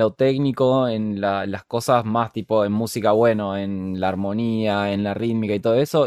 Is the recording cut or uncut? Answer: uncut